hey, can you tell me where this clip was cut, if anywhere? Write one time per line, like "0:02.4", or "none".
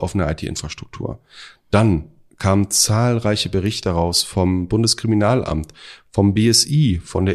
none